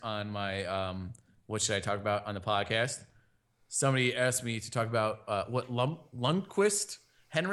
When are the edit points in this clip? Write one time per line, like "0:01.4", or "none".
none